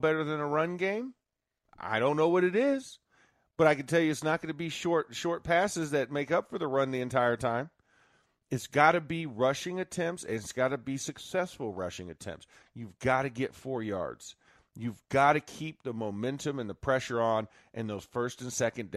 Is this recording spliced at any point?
no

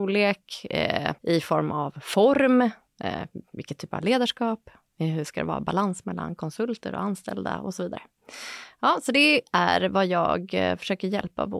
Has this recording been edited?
yes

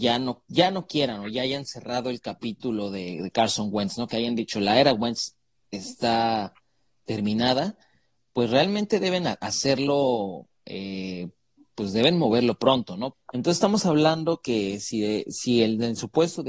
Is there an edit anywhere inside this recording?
yes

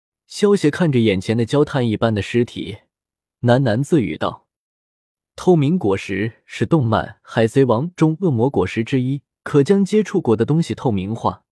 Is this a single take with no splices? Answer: no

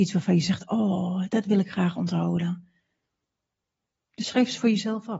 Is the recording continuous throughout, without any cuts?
yes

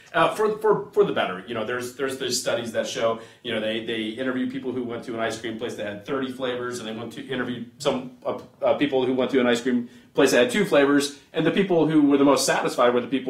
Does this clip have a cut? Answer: no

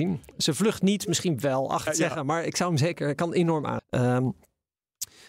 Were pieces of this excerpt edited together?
yes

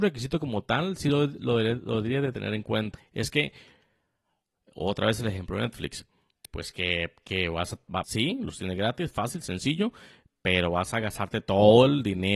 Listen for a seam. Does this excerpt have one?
yes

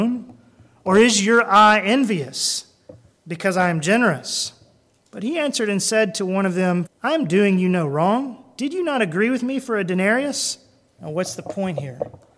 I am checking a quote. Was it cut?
yes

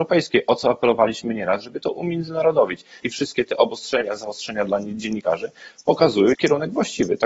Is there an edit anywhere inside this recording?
yes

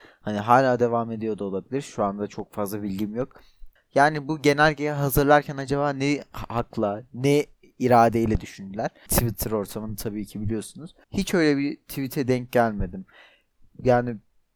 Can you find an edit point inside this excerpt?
yes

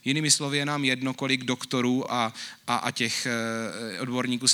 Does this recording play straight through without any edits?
yes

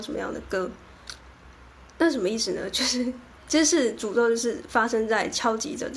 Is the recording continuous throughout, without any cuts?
yes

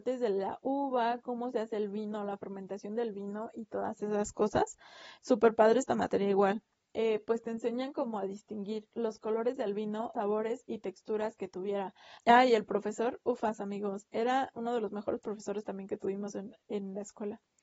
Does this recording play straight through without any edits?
no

